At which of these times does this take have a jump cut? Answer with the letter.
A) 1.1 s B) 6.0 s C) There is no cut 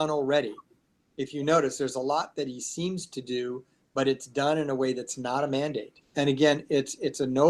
B